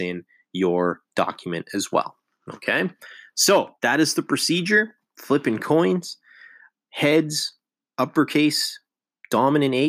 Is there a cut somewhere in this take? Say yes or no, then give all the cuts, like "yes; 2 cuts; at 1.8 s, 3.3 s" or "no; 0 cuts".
yes; 1 cut; at 3.8 s